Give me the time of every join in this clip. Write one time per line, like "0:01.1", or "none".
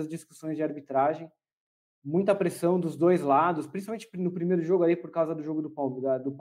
none